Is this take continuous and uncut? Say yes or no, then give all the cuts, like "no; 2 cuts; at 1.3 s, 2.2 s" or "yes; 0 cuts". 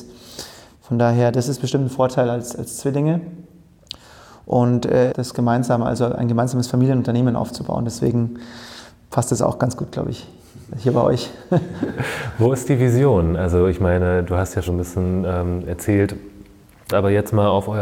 no; 3 cuts; at 5.1 s, 14.7 s, 16.9 s